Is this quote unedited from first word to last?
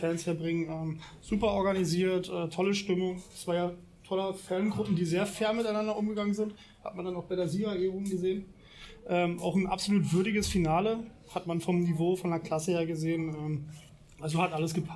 yes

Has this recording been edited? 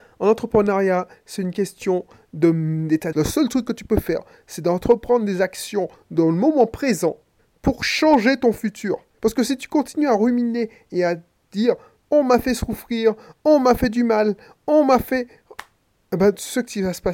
yes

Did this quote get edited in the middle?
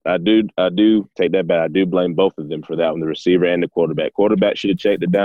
no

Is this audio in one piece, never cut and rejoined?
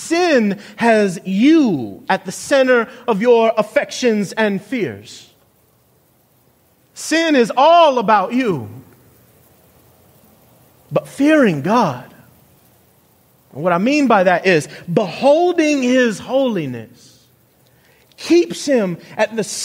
yes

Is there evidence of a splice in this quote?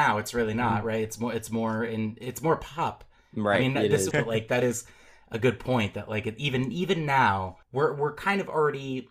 yes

